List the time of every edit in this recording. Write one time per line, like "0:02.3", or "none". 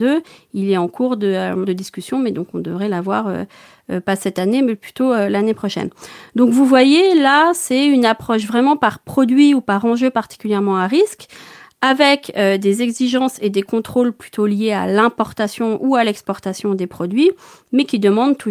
none